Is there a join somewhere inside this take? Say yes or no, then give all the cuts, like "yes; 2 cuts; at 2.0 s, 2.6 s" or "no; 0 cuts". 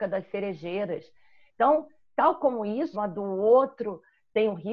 yes; 1 cut; at 2.9 s